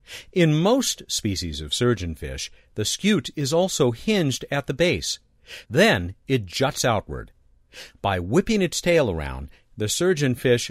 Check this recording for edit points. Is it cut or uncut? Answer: cut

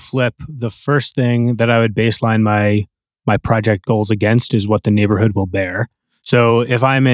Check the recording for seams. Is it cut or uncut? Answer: uncut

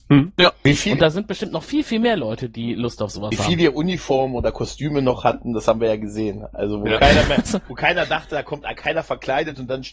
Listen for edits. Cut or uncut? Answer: uncut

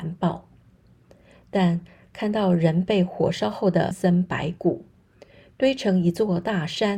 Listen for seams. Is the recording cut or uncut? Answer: cut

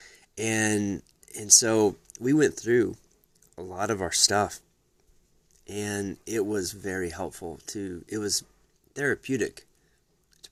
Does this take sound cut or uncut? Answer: uncut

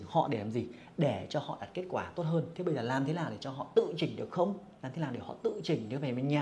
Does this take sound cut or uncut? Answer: cut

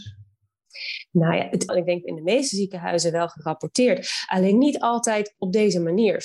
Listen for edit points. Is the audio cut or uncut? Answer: cut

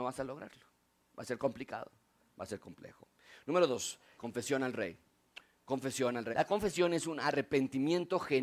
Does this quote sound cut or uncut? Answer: cut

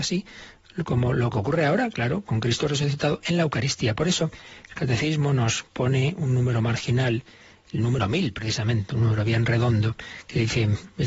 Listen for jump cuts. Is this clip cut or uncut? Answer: uncut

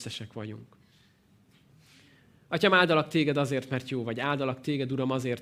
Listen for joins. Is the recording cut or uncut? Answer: uncut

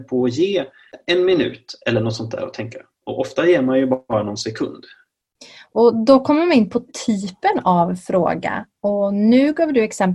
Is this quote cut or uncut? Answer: uncut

